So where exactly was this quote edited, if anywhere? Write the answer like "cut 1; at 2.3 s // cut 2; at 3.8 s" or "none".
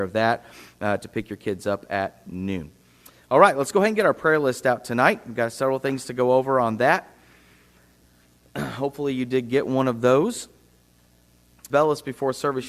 cut 1; at 11.7 s